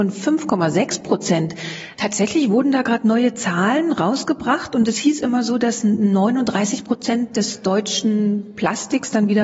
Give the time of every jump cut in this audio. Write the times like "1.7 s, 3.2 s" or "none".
1.9 s